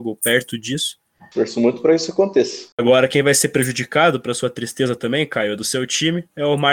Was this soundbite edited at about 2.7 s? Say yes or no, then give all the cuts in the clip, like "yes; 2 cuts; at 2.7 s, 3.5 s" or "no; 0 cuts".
yes; 2 cuts; at 1.3 s, 2.7 s